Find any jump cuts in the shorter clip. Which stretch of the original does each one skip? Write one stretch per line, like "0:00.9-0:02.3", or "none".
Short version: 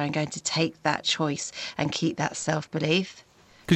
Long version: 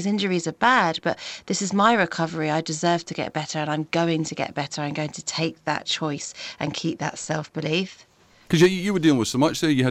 none

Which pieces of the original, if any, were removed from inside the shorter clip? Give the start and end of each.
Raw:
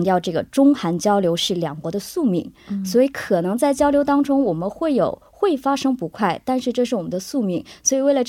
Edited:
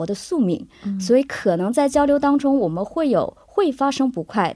none

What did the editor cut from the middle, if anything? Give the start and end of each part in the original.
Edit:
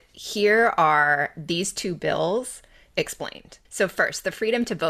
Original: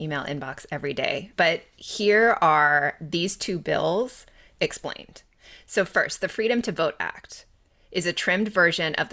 0:05.3-0:05.6

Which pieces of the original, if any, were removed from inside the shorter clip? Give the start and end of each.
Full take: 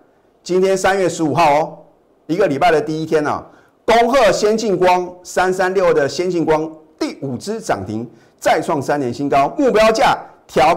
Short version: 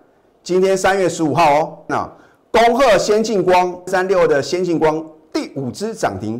0:01.9-0:03.2
0:05.2-0:05.5

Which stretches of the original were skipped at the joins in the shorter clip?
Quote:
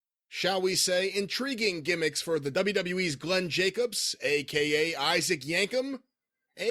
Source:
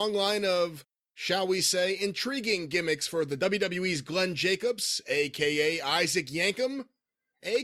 none

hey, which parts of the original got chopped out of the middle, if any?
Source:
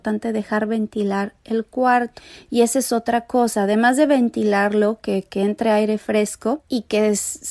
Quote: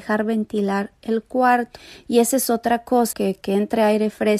0:03.6-0:05.0

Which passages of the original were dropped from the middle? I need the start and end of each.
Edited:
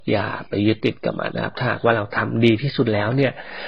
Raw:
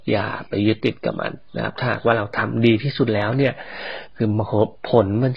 0:01.3-0:01.5

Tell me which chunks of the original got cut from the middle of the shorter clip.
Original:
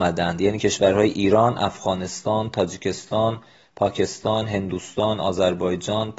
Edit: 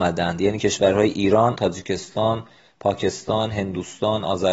0:01.5-0:02.5

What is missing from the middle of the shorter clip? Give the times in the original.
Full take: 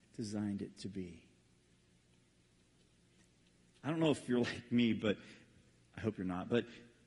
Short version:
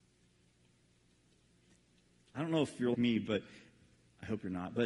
0:04.4-0:04.7

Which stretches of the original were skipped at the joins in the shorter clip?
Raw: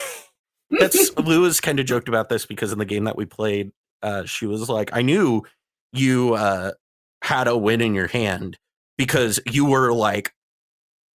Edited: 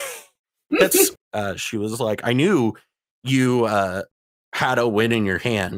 0:01.1-0:03.8

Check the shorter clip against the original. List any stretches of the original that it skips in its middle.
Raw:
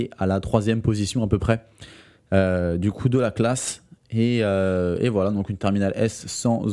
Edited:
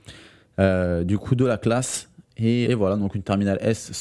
0:04.4-0:05.0

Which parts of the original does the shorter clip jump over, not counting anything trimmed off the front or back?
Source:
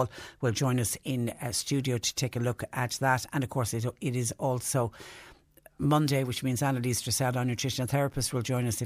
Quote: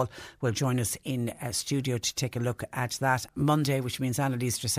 0:03.3-0:05.7

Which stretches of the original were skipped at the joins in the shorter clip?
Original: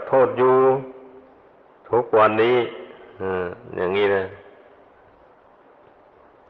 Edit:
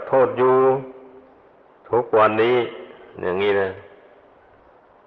0:03.2-0:03.7

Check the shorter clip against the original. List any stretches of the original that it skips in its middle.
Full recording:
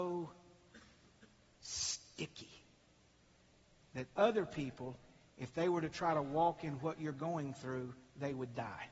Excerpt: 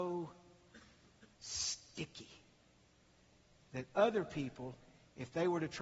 0:01.3-0:01.5

